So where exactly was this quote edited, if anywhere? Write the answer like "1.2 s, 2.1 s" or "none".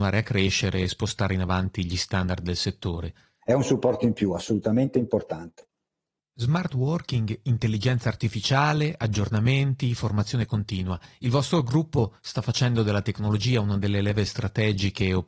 3.4 s